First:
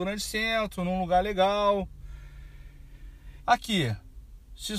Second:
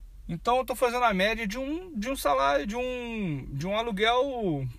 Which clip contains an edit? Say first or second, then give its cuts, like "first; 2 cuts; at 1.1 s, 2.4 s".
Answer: first; 1 cut; at 3.4 s